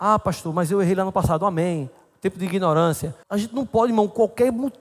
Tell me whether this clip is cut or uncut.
cut